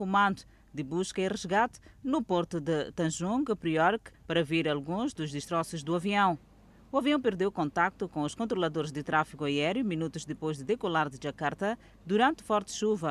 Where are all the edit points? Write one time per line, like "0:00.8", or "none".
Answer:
0:04.1